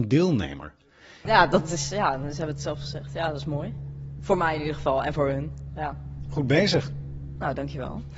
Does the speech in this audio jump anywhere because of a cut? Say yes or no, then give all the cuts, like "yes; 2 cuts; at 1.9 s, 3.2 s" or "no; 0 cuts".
yes; 2 cuts; at 1.3 s, 4.2 s